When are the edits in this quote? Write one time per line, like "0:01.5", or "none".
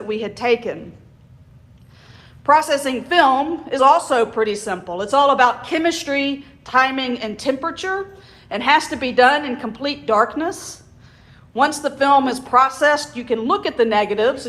none